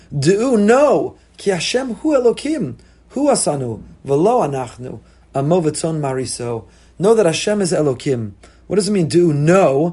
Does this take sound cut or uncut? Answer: uncut